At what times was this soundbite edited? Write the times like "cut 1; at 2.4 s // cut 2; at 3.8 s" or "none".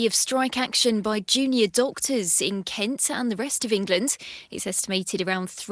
none